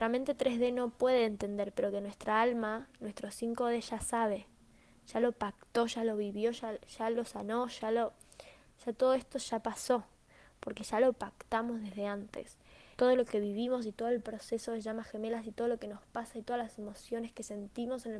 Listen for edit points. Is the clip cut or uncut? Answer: cut